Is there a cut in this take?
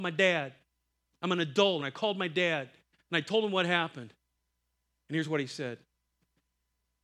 yes; 1 cut; at 1.8 s

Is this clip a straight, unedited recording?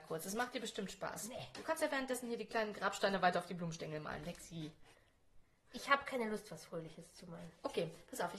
no; 1 cut; at 5.6 s

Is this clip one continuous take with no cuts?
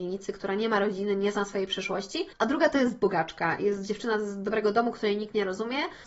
yes; 0 cuts

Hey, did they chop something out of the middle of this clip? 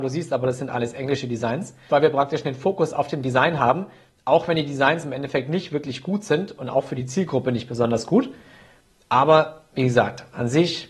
yes; 1 cut; at 1.9 s

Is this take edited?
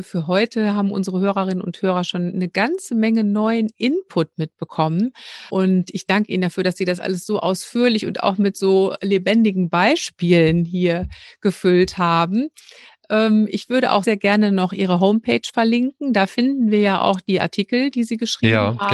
yes; 2 cuts; at 5.5 s, 14.0 s

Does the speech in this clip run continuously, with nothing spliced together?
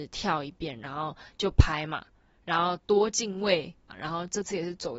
no; 1 cut; at 3.9 s

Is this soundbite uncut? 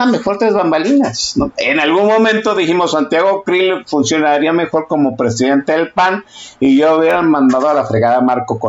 yes; 0 cuts

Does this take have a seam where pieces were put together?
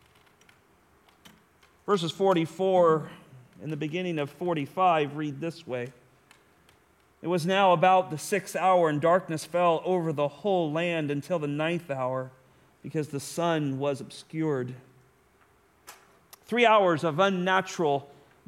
no; 0 cuts

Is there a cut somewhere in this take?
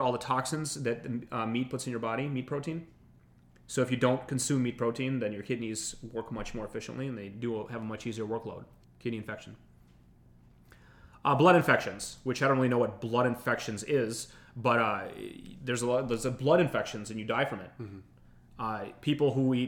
yes; 1 cut; at 8.8 s

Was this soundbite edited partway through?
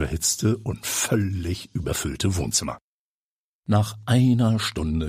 no; 0 cuts

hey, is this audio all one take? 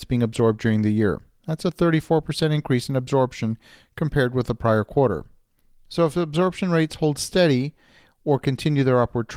yes; 0 cuts

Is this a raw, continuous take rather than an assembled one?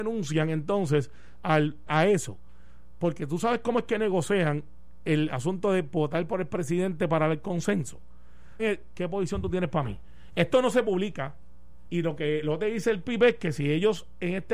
no; 3 cuts; at 1.9 s, 8.6 s, 11.9 s

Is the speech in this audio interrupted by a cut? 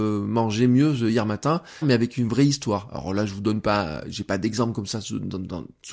yes; 1 cut; at 1.8 s

